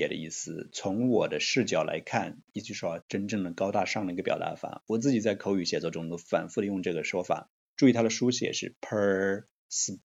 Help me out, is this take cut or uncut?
cut